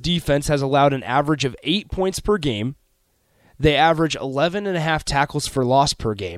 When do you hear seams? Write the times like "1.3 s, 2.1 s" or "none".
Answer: none